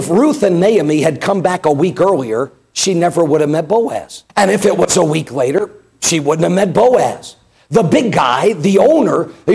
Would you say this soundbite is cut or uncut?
cut